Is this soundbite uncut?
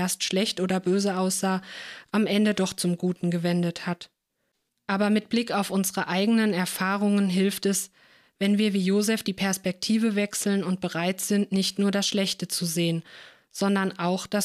no; 1 cut; at 4.7 s

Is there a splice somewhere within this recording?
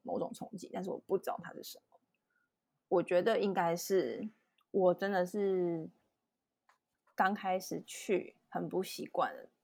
yes; 2 cuts; at 2.8 s, 4.6 s

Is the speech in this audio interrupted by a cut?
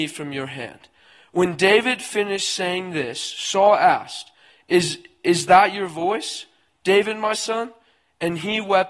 no; 0 cuts

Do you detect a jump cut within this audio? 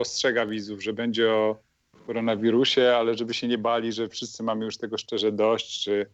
no; 0 cuts

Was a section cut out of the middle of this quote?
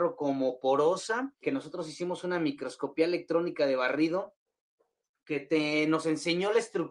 yes; 1 cut; at 1.4 s

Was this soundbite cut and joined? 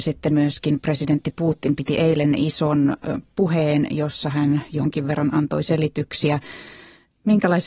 no; 0 cuts

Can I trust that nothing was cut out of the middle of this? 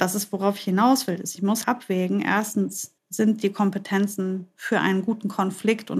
no; 2 cuts; at 1.6 s, 3.0 s

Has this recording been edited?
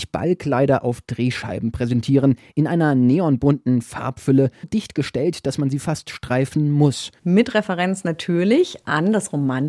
yes; 2 cuts; at 4.6 s, 7.2 s

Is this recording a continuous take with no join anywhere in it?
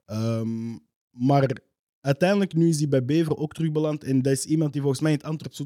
yes; 0 cuts

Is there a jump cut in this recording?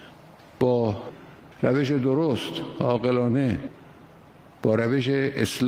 yes; 1 cut; at 1.5 s

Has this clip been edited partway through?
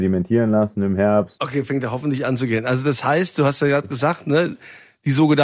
yes; 1 cut; at 1.4 s

